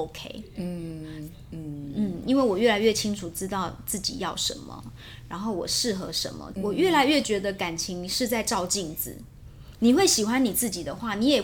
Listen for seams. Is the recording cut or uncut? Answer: cut